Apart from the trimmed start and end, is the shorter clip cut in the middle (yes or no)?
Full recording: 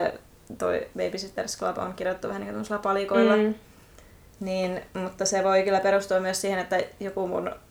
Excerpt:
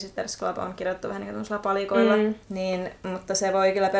yes